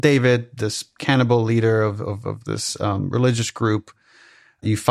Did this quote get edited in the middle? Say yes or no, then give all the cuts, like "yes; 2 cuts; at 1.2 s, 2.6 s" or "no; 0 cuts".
no; 0 cuts